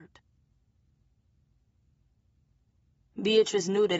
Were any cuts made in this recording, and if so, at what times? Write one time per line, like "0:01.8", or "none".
0:03.1